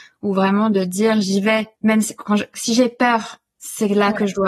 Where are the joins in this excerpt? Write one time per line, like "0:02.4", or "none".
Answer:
0:01.7